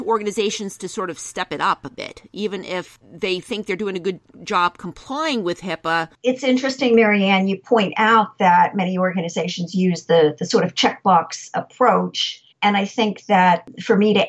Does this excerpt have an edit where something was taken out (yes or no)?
yes